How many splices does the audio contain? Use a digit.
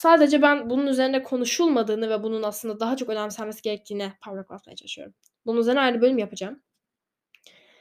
0